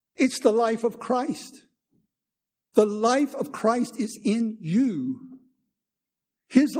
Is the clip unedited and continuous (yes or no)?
yes